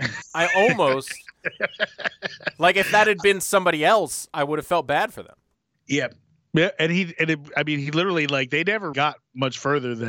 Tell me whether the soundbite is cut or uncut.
cut